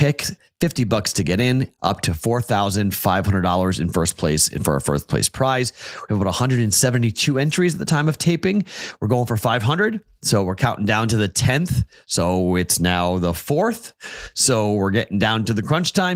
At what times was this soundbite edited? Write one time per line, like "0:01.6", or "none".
none